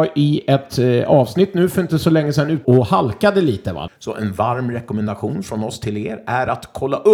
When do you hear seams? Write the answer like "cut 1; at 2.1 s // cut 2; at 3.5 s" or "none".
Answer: cut 1; at 2.6 s // cut 2; at 3.9 s